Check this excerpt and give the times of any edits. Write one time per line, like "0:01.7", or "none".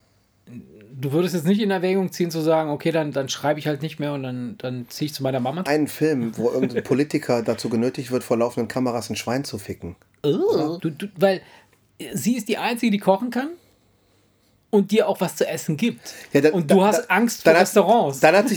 0:05.7
0:10.8